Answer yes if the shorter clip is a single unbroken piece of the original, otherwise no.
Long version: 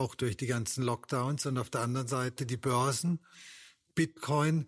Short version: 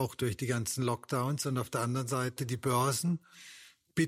yes